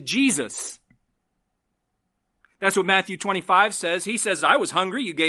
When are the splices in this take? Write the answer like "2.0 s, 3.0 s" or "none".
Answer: none